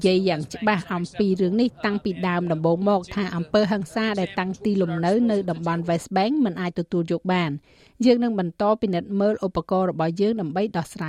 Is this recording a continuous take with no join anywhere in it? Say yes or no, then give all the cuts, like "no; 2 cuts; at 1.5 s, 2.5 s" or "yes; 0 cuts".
yes; 0 cuts